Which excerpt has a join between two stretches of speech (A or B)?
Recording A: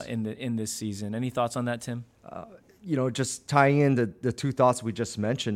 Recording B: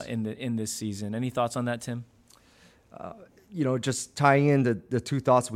A